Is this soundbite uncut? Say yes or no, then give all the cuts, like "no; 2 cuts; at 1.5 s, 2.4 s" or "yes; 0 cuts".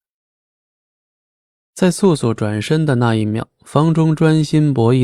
yes; 0 cuts